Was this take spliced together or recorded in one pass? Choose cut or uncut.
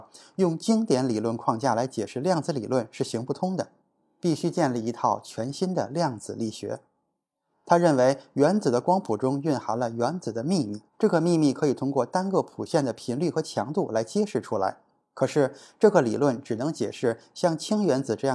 cut